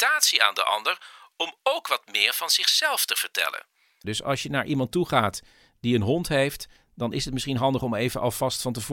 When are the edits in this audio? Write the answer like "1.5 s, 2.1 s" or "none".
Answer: 4.0 s